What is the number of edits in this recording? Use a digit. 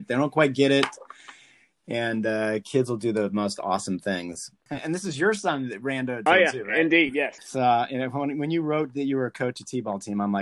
2